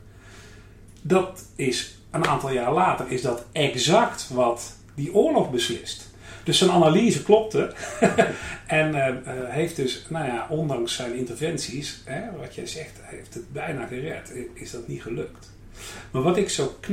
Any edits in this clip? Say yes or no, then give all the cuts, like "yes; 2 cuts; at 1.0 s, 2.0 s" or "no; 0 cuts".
no; 0 cuts